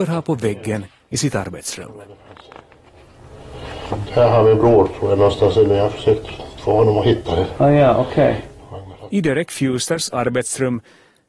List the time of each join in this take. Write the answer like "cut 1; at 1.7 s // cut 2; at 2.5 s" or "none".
none